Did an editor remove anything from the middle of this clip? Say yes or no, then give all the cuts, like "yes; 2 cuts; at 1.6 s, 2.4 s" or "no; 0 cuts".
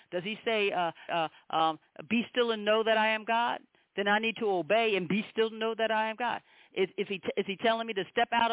yes; 1 cut; at 1.1 s